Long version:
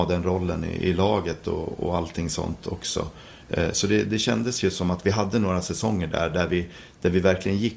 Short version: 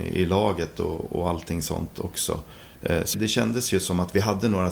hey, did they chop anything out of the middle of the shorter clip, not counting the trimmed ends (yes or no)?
yes